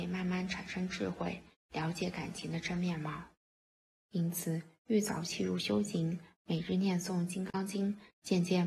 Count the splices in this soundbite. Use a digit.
1